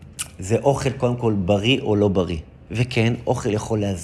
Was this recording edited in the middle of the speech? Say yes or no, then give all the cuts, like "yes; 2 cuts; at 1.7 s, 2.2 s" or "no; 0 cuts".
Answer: yes; 1 cut; at 2.7 s